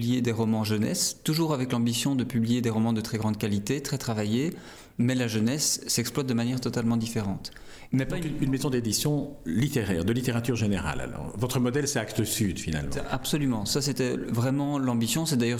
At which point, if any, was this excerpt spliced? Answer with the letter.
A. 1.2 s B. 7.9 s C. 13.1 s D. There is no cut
B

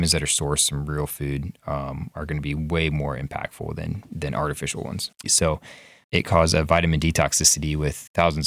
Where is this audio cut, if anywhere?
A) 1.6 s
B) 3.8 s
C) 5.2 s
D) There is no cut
C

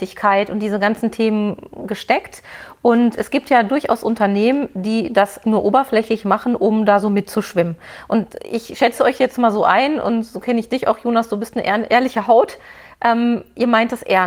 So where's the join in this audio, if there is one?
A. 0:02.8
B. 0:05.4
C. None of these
B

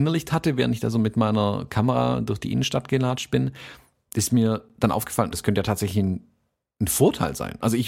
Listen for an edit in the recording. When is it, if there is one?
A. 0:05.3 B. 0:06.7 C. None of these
A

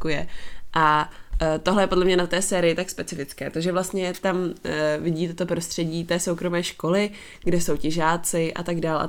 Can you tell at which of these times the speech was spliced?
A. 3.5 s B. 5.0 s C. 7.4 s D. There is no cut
C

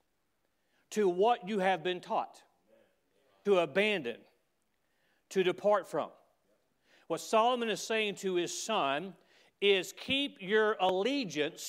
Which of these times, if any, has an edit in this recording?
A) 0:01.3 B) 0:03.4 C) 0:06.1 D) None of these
B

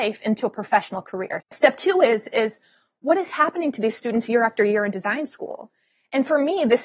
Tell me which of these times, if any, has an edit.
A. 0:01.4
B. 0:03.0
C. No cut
A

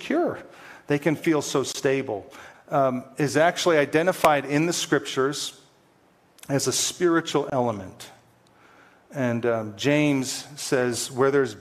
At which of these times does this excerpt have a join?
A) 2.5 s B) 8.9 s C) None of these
A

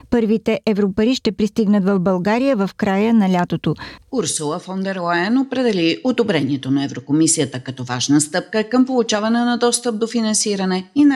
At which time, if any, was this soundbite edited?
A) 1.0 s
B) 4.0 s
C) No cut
B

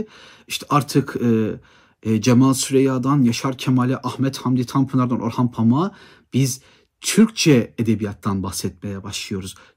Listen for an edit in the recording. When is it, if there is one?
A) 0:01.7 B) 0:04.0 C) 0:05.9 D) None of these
D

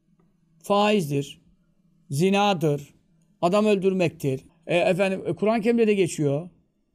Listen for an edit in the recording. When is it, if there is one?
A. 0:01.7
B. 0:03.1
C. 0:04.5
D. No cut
C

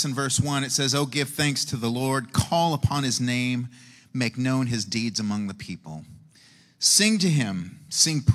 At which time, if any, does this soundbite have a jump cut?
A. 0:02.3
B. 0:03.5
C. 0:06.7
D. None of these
D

